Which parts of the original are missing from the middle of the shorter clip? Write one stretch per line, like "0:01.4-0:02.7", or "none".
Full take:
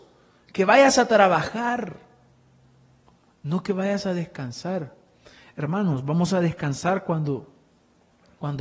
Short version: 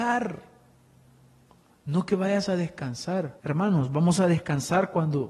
0:05.0-0:05.5